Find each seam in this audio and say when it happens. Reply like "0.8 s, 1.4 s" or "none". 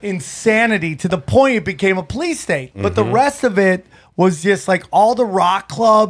2.7 s